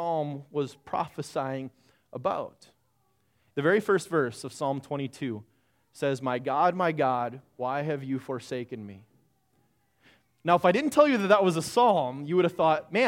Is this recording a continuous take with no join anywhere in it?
no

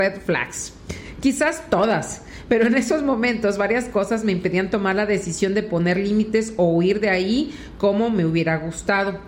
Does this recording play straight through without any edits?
yes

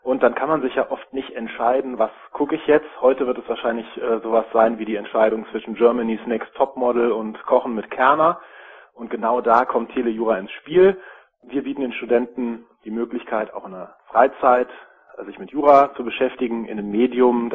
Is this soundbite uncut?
yes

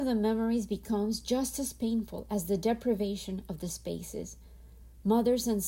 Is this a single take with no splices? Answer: yes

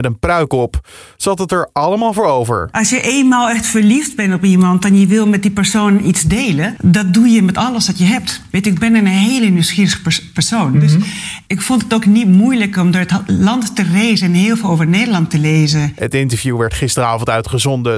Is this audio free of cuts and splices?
yes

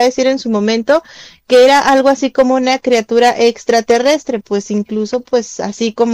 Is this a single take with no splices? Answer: yes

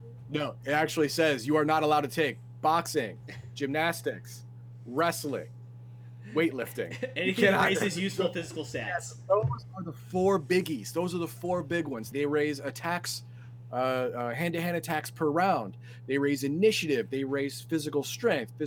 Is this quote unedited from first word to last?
no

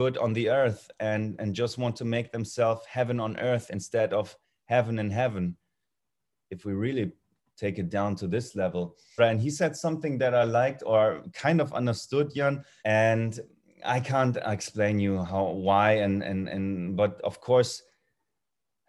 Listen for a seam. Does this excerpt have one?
yes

